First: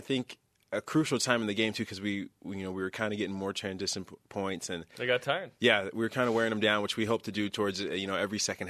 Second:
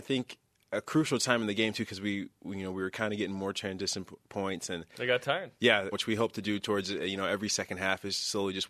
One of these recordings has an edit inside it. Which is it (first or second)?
second